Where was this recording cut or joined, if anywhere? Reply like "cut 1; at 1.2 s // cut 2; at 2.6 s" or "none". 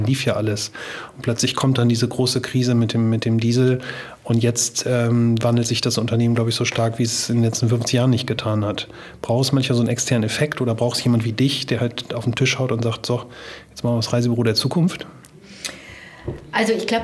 none